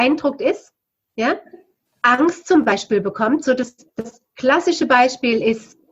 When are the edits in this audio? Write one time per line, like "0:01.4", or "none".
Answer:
0:01.9

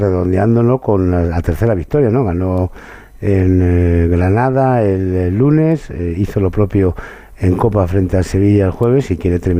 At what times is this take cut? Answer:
none

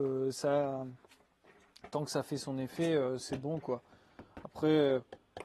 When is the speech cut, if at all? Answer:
none

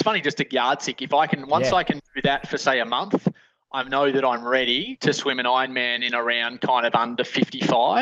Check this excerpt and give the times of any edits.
none

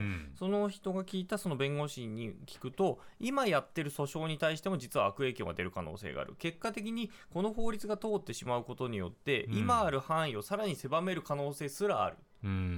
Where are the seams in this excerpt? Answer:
none

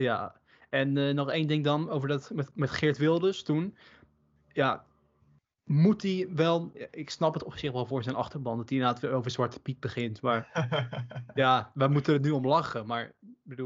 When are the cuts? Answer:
none

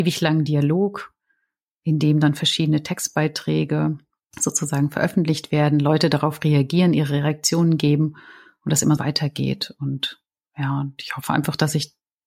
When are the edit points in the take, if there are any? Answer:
0:09.0

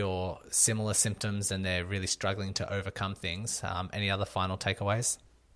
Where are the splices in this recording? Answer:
none

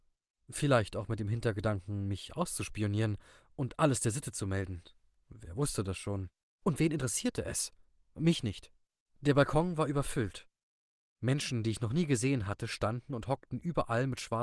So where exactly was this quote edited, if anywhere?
none

